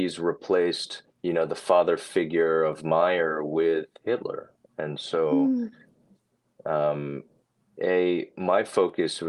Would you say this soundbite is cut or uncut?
cut